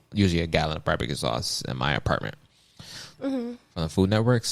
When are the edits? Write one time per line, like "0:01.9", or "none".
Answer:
0:03.1